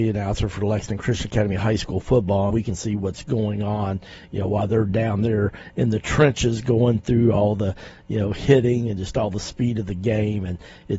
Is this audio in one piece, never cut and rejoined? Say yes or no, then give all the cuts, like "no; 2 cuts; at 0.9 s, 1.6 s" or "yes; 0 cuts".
no; 1 cut; at 2.5 s